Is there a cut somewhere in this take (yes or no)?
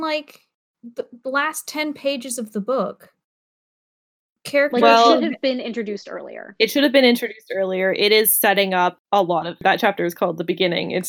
no